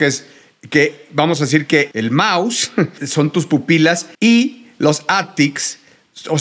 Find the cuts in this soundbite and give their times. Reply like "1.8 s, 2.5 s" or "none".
1.9 s, 4.1 s

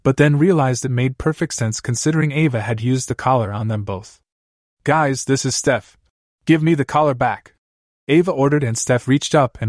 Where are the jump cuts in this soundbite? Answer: 6.4 s

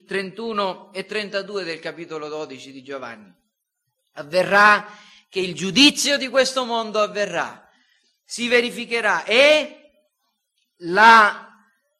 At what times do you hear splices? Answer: none

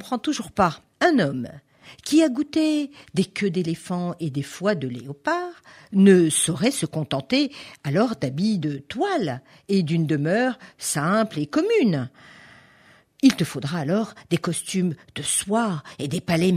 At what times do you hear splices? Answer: 0.9 s

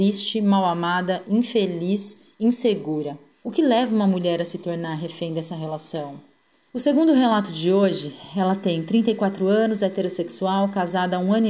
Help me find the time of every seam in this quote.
3.4 s, 6.7 s

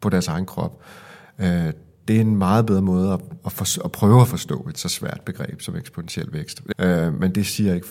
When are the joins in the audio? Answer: 6.7 s

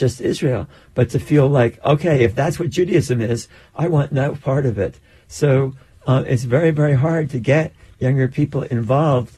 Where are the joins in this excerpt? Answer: none

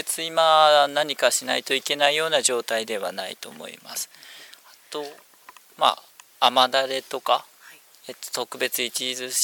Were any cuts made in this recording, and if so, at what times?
none

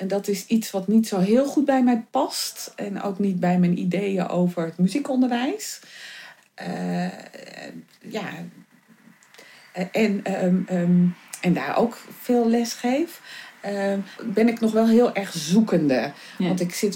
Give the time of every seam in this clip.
6.4 s, 14.2 s

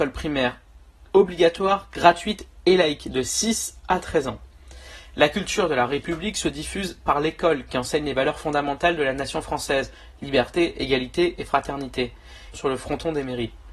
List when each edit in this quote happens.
12.5 s

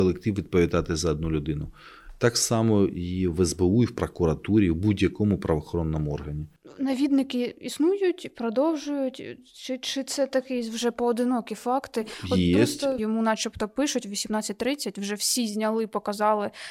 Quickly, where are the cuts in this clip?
13.0 s

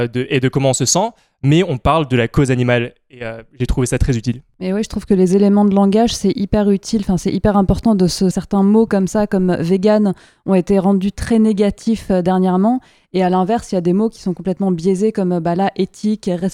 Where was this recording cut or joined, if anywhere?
8.3 s

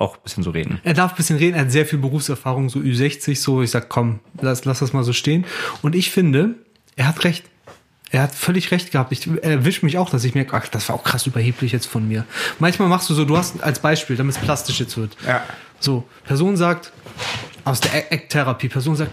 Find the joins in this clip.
none

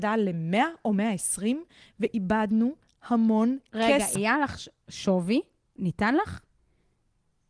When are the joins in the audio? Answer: 4.2 s, 5.8 s

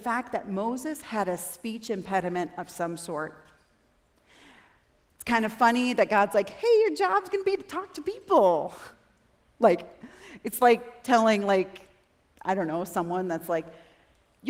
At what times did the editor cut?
none

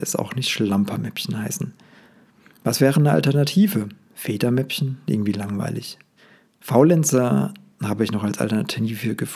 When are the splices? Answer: none

